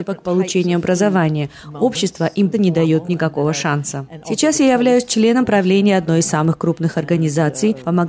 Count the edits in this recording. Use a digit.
1